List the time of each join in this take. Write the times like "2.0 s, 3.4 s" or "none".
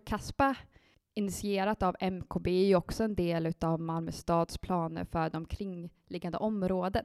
0.9 s